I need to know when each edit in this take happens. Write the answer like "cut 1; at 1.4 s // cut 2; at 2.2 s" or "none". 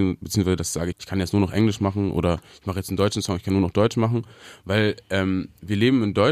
cut 1; at 0.9 s